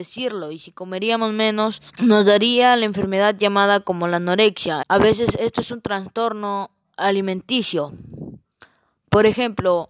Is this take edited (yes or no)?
yes